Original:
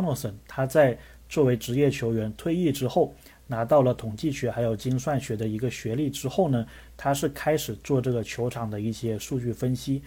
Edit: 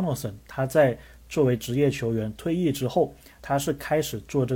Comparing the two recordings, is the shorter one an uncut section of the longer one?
no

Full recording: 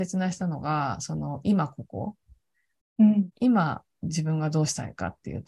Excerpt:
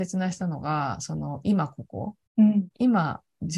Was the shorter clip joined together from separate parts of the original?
yes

